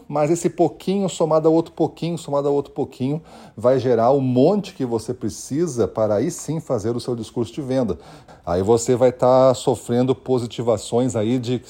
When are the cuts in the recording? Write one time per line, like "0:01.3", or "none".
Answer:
0:08.3